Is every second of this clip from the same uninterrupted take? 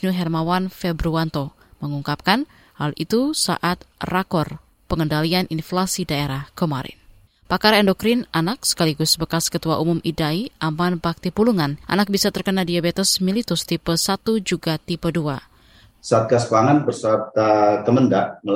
no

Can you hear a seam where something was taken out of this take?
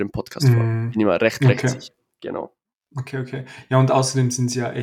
no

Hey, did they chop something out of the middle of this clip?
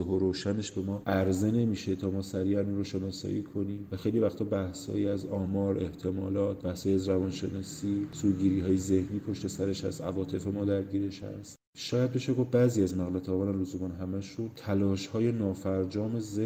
no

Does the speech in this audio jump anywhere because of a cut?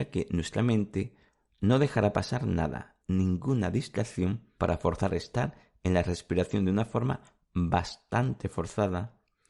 yes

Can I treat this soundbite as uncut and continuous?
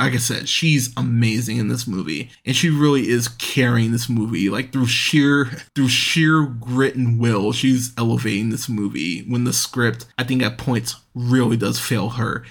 yes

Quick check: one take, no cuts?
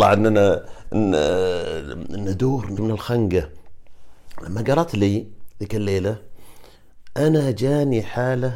no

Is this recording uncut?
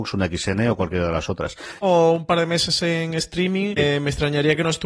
no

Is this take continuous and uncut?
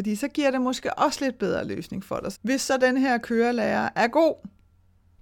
no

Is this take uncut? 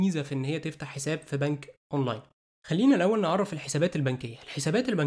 yes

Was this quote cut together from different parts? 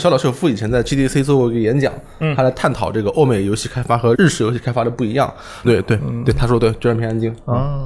yes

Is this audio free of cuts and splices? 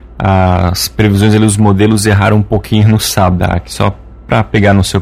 no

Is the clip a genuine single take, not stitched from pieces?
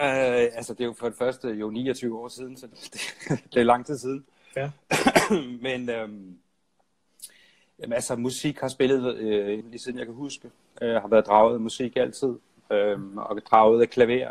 no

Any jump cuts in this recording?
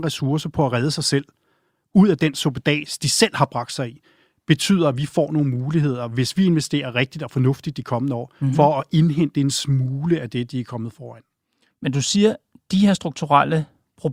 no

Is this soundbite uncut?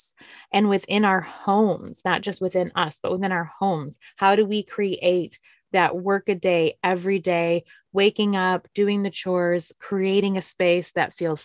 no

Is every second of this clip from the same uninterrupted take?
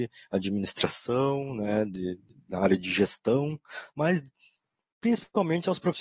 no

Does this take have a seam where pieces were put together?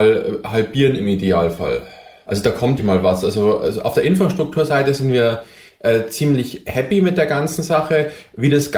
yes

